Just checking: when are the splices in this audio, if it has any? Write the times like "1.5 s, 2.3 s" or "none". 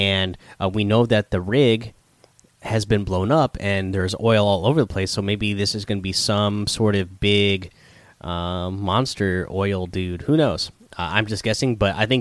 none